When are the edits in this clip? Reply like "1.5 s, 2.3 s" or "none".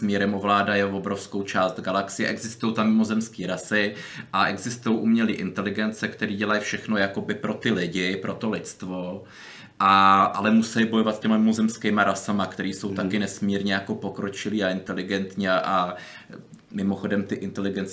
none